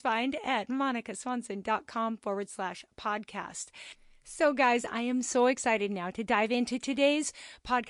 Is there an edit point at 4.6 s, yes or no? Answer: no